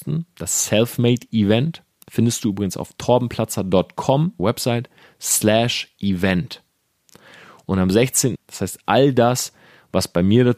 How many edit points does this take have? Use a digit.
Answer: 2